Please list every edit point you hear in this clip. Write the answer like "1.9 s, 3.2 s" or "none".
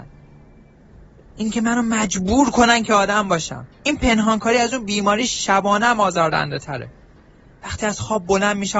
3.7 s